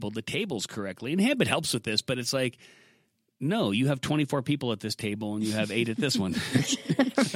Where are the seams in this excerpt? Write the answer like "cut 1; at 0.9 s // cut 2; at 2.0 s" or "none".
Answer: none